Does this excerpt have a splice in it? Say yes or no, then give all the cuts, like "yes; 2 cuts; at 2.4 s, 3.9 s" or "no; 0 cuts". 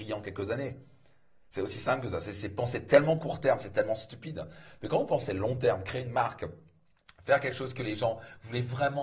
no; 0 cuts